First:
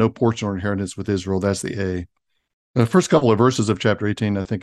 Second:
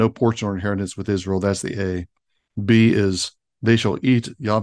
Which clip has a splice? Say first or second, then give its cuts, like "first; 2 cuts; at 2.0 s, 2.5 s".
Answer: first; 1 cut; at 2.5 s